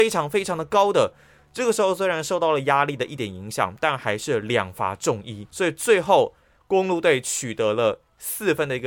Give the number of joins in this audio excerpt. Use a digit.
1